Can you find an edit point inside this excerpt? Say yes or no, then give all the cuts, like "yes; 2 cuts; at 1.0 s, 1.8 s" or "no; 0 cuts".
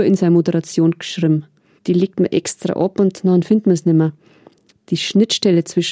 yes; 2 cuts; at 1.8 s, 4.7 s